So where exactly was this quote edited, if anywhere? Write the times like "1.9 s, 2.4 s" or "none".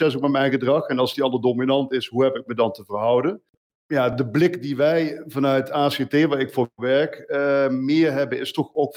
none

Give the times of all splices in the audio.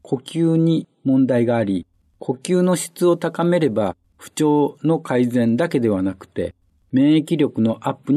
none

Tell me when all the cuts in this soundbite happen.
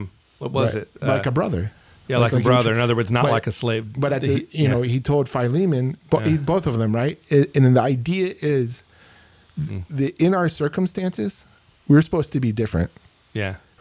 none

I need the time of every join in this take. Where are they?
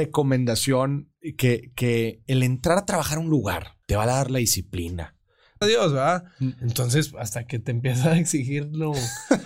3.8 s, 5.6 s

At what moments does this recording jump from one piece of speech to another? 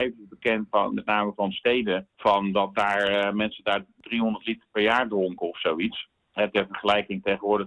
none

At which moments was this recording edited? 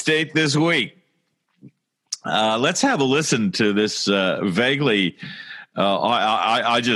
none

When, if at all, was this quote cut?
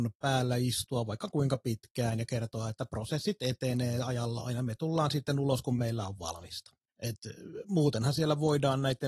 6.9 s

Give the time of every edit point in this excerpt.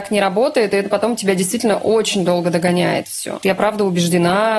3.4 s

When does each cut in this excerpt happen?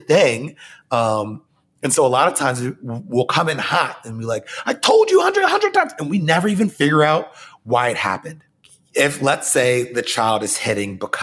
none

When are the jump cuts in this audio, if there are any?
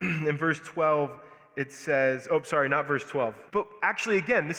3.5 s

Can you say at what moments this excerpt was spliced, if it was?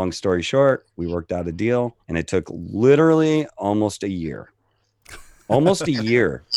2.0 s

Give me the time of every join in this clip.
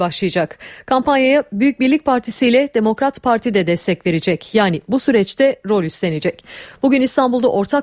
none

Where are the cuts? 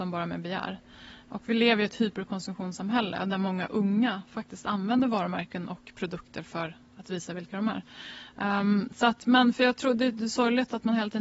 none

